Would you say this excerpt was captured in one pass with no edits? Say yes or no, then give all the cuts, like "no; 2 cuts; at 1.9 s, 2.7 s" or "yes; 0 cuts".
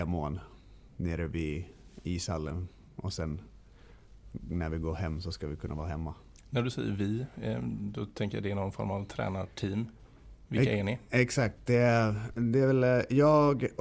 yes; 0 cuts